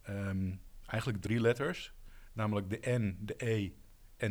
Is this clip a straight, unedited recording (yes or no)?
yes